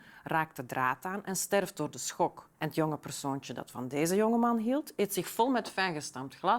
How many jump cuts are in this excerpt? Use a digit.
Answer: 1